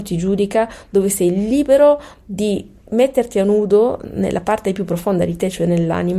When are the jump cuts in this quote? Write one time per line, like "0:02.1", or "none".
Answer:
none